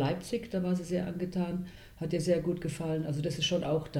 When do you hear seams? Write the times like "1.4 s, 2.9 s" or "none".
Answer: none